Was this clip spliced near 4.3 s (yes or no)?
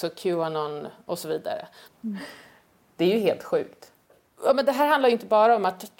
no